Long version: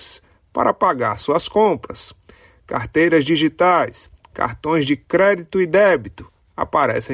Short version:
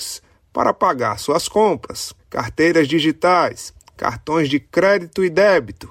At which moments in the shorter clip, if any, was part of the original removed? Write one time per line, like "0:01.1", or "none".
0:02.2